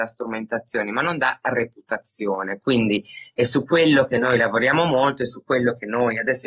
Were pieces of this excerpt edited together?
yes; 1 cut; at 2.6 s

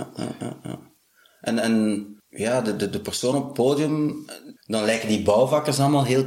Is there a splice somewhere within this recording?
yes; 2 cuts; at 2.2 s, 4.6 s

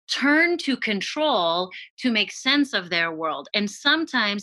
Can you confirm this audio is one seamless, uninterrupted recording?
yes; 0 cuts

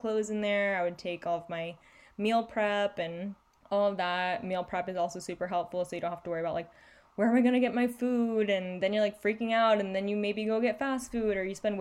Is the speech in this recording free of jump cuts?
yes; 0 cuts

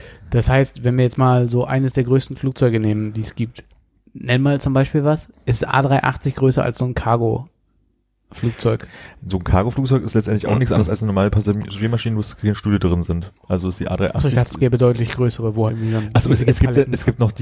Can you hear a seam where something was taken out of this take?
yes; 2 cuts; at 5.3 s, 15.7 s

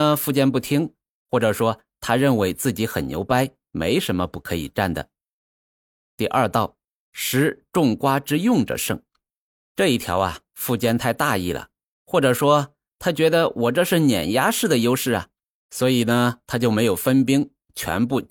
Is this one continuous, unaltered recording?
yes; 0 cuts

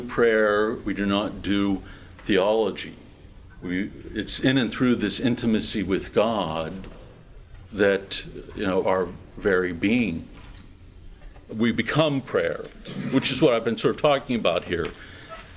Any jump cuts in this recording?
yes; 2 cuts; at 8.8 s, 11.5 s

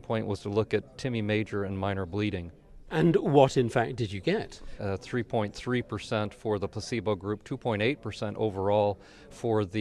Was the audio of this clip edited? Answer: yes; 1 cut; at 4.8 s

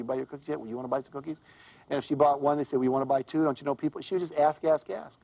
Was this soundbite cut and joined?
no; 0 cuts

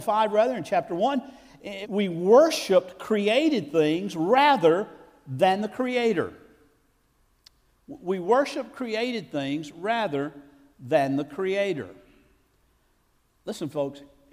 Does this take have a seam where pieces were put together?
yes; 1 cut; at 1.8 s

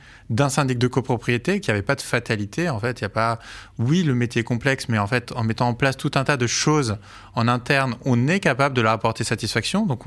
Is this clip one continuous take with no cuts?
yes; 0 cuts

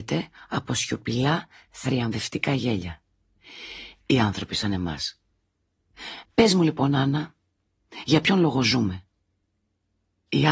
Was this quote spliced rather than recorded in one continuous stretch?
yes; 2 cuts; at 4.0 s, 6.3 s

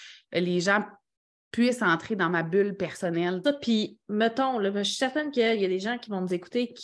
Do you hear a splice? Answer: yes; 1 cut; at 3.4 s

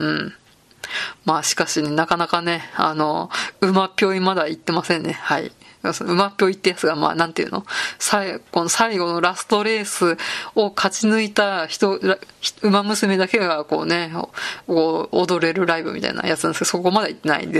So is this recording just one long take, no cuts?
yes; 0 cuts

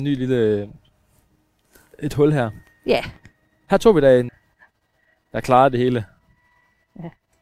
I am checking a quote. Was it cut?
yes; 1 cut; at 4.3 s

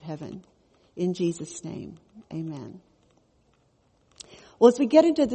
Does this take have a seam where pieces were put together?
no; 0 cuts

